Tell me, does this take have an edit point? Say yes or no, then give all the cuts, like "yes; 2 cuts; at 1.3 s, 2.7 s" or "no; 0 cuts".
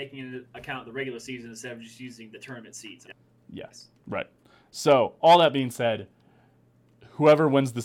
yes; 1 cut; at 3.1 s